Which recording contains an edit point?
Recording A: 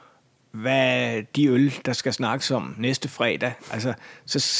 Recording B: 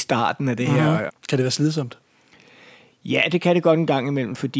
B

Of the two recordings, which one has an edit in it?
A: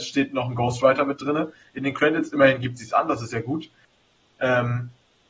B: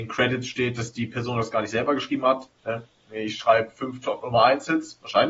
B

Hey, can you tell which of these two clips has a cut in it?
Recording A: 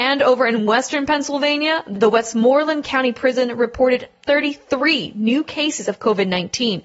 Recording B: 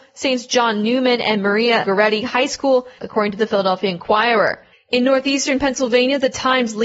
B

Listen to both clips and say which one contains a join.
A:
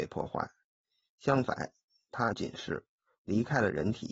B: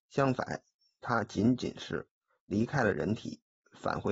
A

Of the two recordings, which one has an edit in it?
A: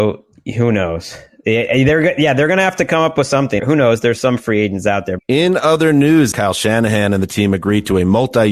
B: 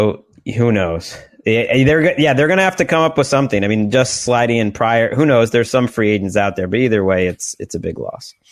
A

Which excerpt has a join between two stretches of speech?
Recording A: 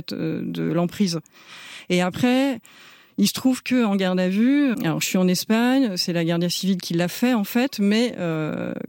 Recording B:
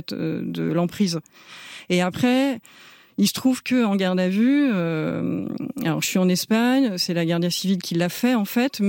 A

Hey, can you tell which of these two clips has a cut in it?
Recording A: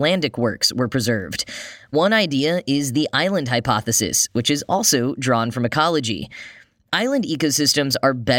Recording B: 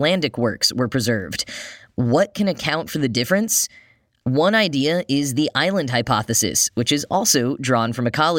A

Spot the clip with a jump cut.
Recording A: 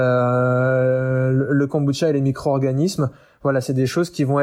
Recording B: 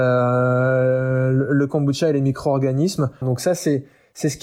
B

